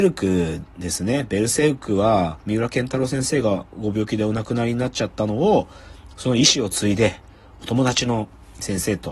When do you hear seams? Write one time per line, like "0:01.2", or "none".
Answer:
none